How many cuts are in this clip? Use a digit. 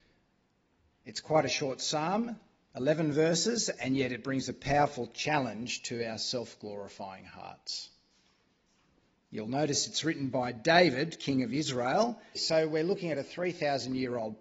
1